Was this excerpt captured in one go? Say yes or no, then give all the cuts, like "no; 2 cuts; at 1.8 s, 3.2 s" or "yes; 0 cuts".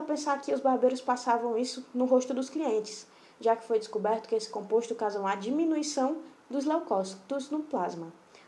yes; 0 cuts